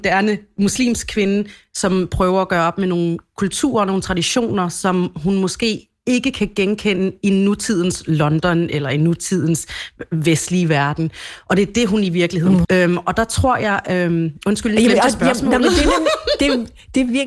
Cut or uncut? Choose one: cut